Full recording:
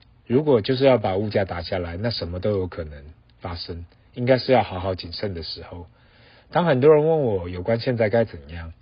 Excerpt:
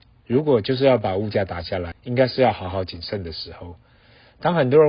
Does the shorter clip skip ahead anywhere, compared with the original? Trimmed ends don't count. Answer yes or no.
yes